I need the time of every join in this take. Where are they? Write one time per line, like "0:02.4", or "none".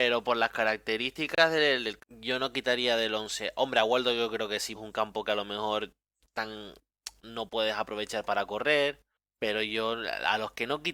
0:02.0
0:04.7